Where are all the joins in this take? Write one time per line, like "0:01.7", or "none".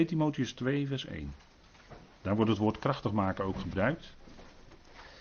none